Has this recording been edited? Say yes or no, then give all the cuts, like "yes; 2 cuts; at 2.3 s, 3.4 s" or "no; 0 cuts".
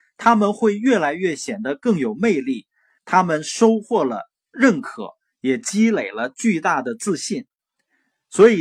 yes; 1 cut; at 3.0 s